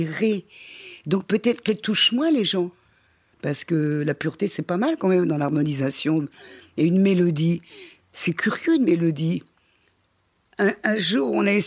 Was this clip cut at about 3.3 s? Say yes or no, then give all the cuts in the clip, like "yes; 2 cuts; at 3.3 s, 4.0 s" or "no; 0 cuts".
yes; 1 cut; at 3.3 s